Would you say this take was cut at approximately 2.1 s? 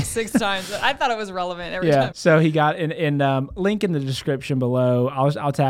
yes; 1 cut; at 2.1 s

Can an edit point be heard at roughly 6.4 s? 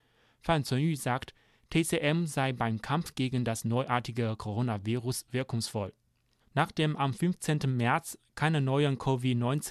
yes; 1 cut; at 6.4 s

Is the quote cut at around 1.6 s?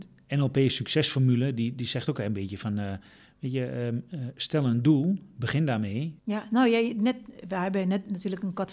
no; 1 cut; at 6.2 s

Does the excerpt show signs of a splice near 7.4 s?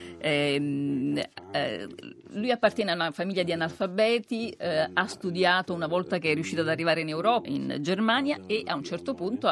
yes; 1 cut; at 7.4 s

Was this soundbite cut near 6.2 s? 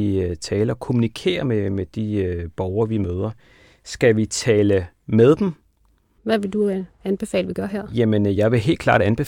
yes; 1 cut; at 6.2 s

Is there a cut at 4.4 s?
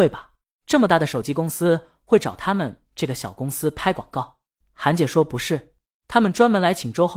no; 0 cuts

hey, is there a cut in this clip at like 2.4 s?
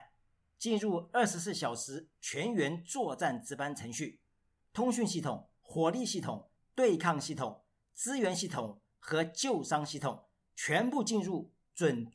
no; 2 cuts; at 4.6 s, 6.6 s

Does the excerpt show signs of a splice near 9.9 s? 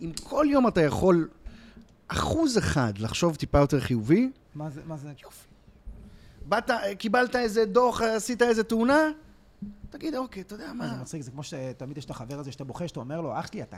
no; 1 cut; at 5.2 s

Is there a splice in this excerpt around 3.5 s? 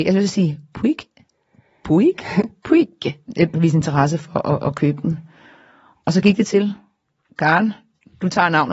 yes; 1 cut; at 3.5 s

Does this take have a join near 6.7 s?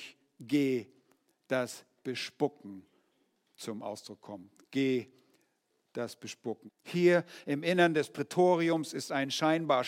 yes; 1 cut; at 6.7 s

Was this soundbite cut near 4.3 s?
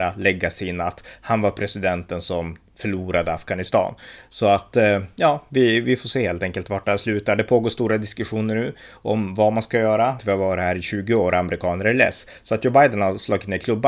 no; 1 cut; at 10.2 s

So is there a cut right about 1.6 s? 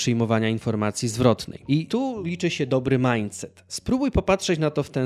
no; 0 cuts

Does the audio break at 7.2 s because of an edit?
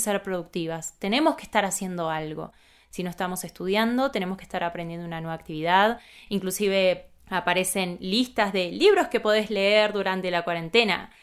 yes; 1 cut; at 7.2 s

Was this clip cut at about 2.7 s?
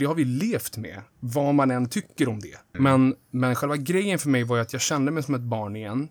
yes; 1 cut; at 2.7 s

